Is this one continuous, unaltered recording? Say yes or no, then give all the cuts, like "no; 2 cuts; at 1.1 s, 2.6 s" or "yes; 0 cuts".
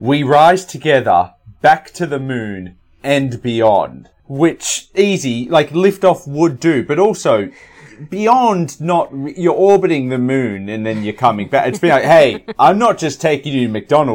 no; 1 cut; at 4.2 s